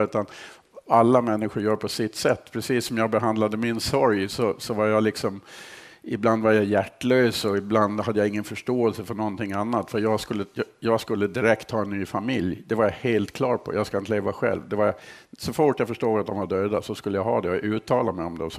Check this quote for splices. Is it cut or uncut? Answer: uncut